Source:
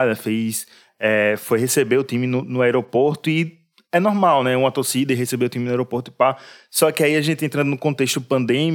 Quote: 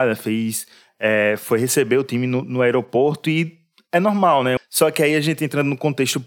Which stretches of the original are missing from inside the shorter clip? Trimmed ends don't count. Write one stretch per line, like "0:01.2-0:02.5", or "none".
0:04.6-0:06.6